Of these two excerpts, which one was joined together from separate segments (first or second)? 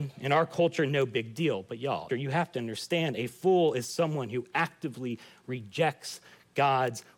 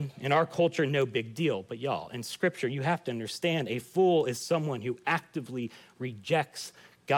first